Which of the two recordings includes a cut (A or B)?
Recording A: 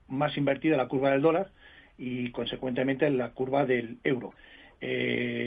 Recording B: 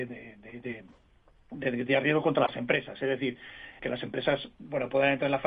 B